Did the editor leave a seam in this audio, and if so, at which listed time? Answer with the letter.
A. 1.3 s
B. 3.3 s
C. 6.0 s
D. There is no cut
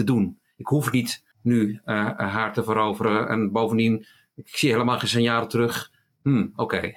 A